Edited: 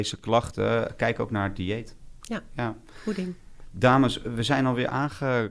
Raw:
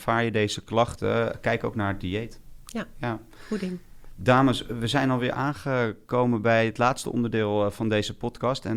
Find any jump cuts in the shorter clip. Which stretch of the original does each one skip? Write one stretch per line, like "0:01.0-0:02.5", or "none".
none